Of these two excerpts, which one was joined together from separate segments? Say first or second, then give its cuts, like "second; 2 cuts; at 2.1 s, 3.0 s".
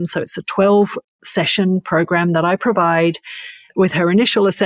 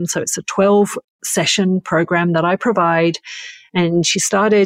first; 1 cut; at 3.7 s